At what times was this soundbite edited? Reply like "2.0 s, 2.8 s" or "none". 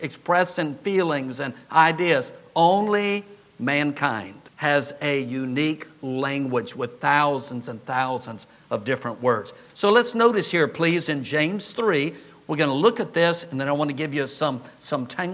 4.5 s